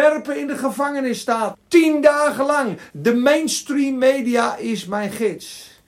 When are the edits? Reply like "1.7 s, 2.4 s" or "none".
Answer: 1.5 s, 2.9 s

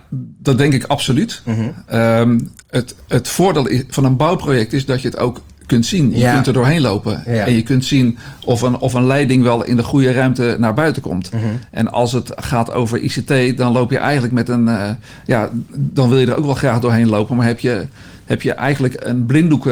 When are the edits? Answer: 2.6 s

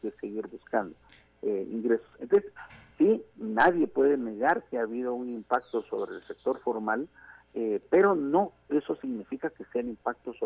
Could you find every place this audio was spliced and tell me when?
none

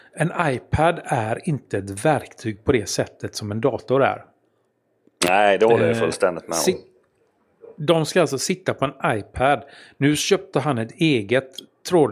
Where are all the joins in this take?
none

